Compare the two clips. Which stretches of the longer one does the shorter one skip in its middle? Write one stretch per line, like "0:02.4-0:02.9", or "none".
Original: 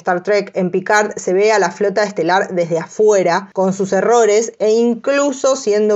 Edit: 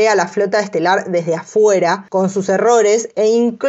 none